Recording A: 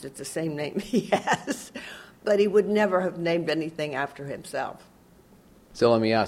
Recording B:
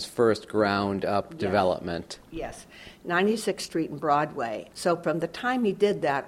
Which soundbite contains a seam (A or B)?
B